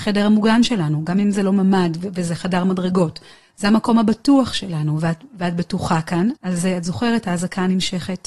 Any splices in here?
yes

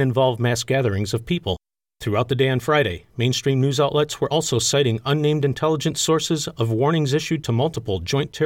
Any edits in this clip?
no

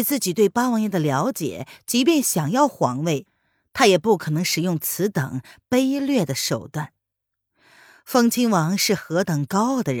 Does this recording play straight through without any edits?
yes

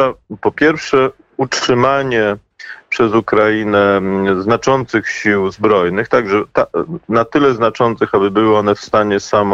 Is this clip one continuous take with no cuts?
yes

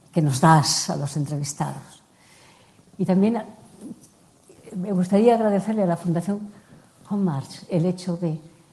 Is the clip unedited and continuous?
yes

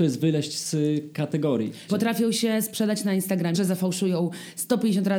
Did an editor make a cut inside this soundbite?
yes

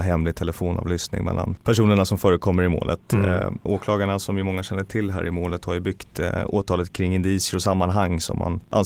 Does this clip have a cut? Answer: yes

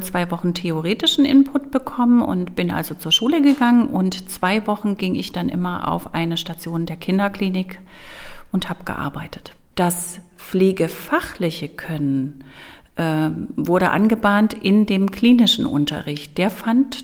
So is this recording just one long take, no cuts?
no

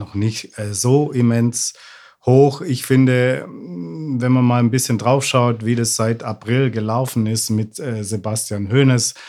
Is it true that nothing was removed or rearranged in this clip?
yes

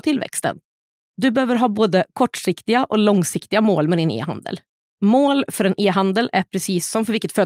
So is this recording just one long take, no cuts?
yes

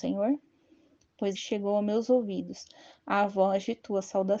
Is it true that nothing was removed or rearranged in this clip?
no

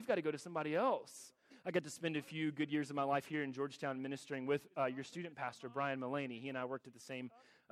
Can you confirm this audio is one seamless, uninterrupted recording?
no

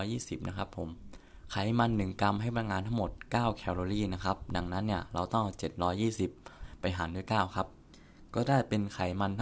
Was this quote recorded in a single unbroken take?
yes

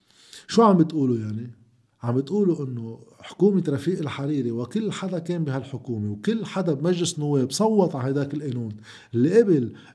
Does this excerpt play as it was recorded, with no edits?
yes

